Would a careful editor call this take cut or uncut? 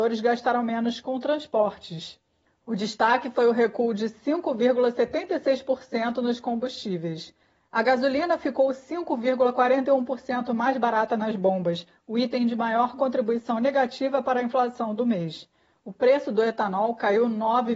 uncut